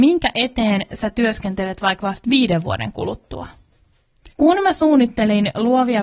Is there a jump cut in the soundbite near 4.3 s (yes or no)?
yes